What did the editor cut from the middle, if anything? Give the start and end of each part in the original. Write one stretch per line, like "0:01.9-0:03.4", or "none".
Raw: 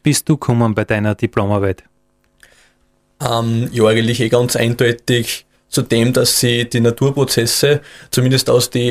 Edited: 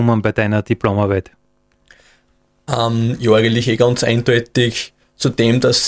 none